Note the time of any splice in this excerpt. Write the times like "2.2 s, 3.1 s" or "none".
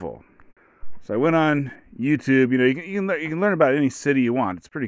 none